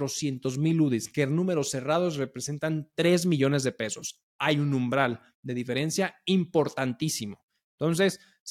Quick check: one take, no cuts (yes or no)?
yes